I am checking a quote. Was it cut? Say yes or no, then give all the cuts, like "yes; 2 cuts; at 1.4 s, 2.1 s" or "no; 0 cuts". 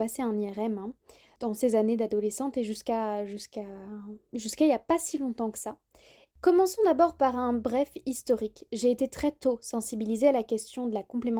yes; 1 cut; at 6.3 s